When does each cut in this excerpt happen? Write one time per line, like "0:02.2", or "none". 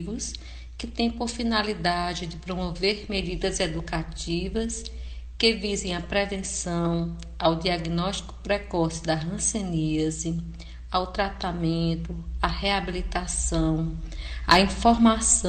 none